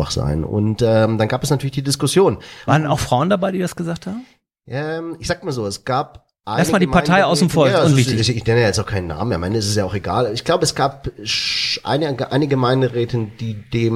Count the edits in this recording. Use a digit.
1